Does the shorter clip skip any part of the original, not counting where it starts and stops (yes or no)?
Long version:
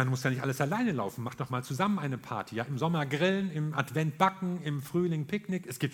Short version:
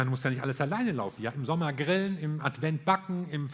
yes